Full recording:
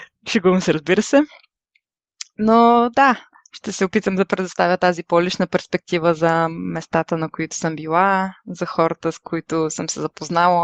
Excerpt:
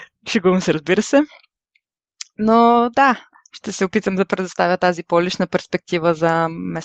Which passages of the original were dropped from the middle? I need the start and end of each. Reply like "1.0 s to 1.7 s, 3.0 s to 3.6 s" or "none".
none

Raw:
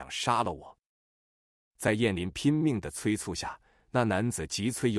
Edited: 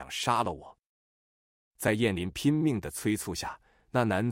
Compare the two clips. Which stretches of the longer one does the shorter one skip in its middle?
none

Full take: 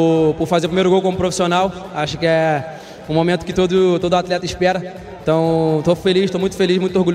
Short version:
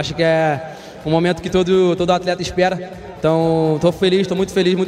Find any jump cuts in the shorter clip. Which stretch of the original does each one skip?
none

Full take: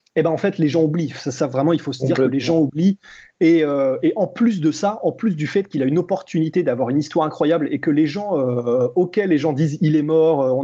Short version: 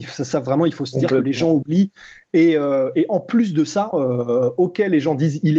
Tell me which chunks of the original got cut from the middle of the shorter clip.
5.0 s to 8.3 s

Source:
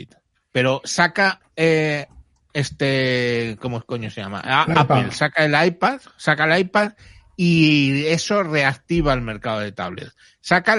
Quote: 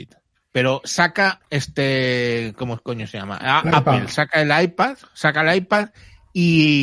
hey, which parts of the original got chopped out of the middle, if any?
1.4 s to 2.5 s

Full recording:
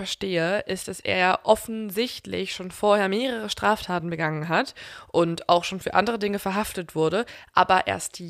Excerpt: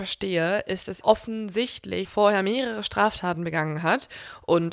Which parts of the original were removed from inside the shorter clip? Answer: 1.0 s to 1.4 s, 2.5 s to 2.7 s

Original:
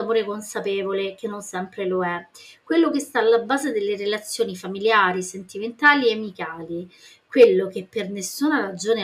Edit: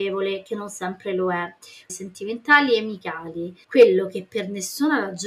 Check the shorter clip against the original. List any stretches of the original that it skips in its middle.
2.6 s to 5.2 s, 7.0 s to 7.2 s

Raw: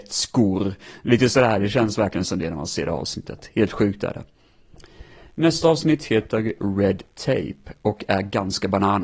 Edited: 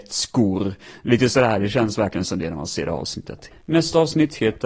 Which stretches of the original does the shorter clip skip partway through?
3.5 s to 5.2 s

